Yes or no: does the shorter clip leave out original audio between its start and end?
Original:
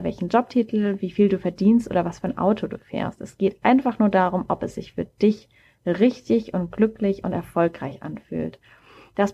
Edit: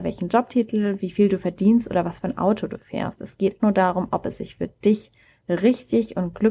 yes